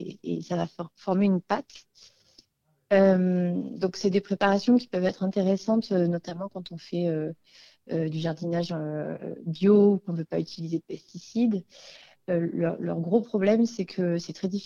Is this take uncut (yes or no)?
yes